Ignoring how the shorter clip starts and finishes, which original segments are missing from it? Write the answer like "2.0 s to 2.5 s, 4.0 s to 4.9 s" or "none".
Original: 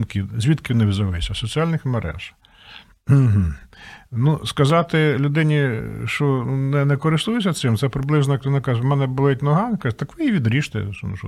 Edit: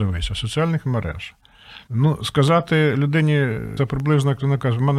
2.9 s to 4.1 s, 6.0 s to 7.8 s